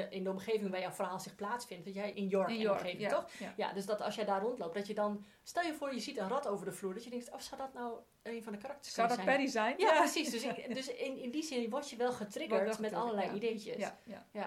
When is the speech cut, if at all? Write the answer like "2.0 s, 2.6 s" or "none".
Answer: 2.1 s